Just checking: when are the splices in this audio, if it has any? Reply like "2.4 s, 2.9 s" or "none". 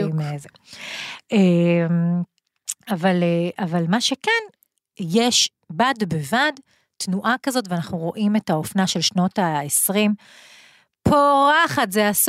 none